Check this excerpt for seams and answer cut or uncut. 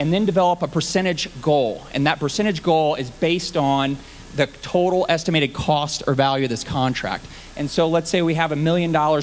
uncut